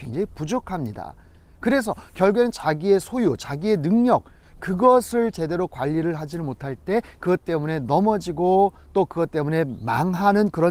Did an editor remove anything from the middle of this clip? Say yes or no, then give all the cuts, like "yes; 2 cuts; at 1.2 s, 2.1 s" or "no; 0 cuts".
no; 0 cuts